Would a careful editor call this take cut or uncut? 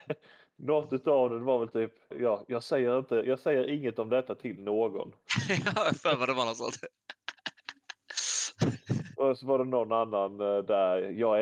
cut